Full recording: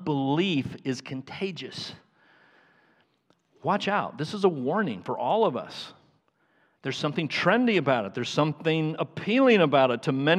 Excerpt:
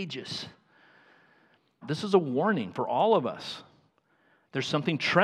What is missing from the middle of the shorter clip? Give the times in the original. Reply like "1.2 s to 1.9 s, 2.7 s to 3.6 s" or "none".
3.3 s to 4.1 s